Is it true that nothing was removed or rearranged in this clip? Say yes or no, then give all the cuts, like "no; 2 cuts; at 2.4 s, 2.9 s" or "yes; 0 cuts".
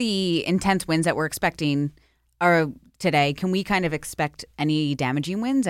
yes; 0 cuts